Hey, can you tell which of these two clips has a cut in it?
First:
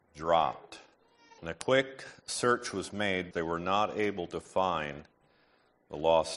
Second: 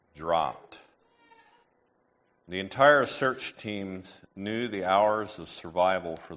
first; 2 cuts; at 1.4 s, 3.3 s

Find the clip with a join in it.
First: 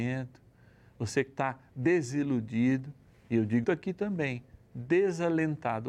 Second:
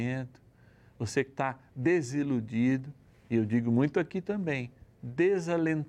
first; 1 cut; at 3.6 s

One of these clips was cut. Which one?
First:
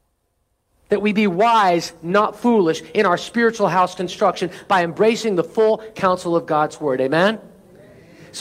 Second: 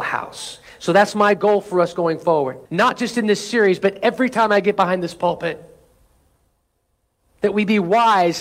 second; 1 cut; at 2.7 s

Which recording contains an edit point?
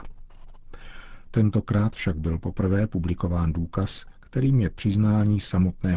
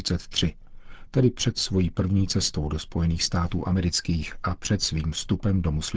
first; 1 cut; at 1.2 s

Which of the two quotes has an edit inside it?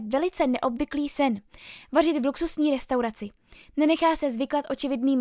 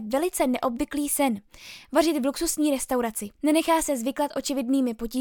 second; 1 cut; at 3.3 s

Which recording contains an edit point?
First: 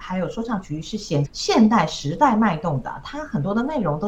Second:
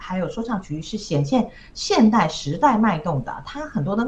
first; 1 cut; at 1.2 s

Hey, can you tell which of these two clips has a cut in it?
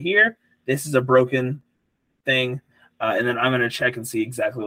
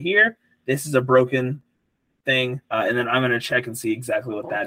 second; 1 cut; at 2.6 s

